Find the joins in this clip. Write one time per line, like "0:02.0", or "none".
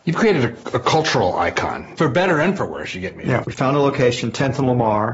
0:03.4